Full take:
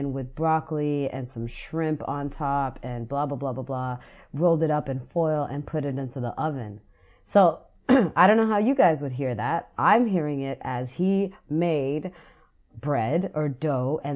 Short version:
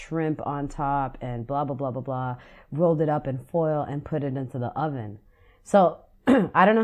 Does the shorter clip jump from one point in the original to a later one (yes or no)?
no